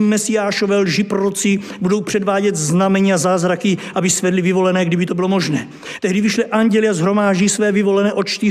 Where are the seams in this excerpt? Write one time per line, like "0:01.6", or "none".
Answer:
0:06.0